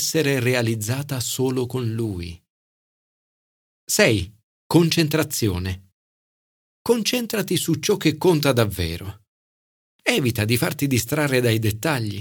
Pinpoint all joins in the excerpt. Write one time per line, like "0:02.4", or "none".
none